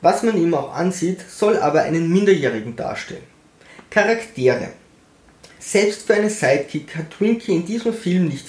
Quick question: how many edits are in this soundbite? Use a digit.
0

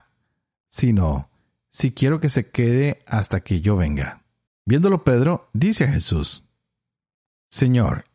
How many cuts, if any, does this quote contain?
1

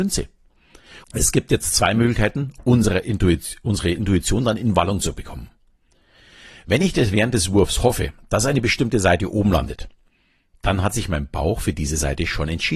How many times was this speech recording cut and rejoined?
1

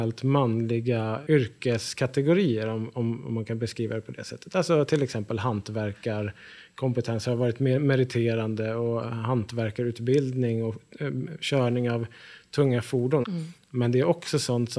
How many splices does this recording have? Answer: 2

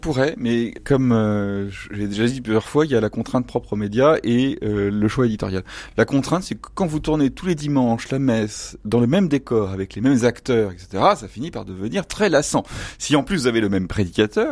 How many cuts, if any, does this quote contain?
0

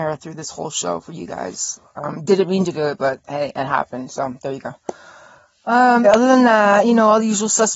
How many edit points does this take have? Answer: 1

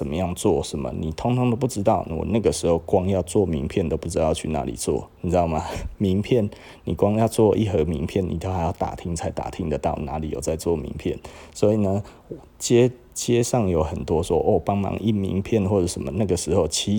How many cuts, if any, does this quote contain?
1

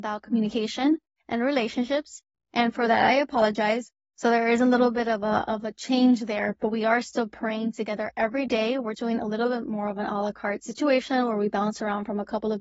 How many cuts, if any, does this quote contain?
1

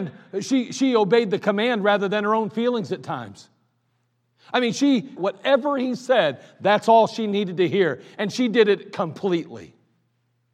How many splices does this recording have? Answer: 1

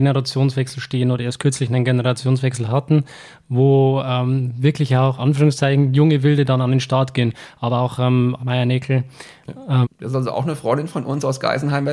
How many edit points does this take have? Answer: 3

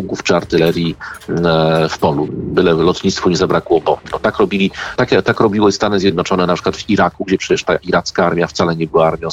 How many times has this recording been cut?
2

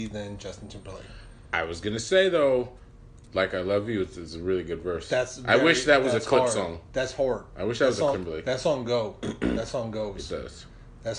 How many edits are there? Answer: 2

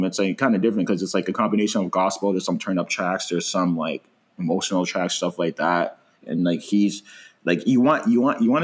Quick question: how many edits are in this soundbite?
1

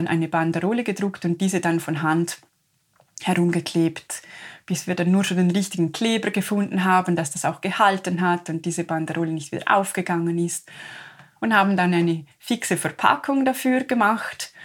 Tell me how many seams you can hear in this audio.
1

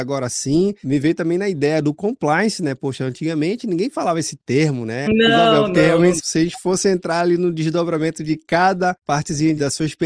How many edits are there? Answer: 2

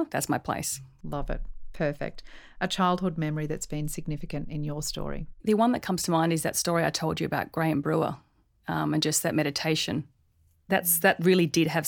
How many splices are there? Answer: 1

